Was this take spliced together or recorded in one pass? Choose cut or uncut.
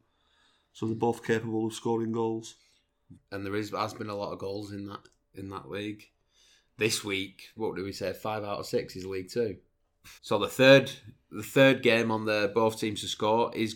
cut